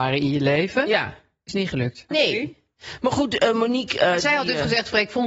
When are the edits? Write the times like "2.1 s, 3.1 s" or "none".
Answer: 2.1 s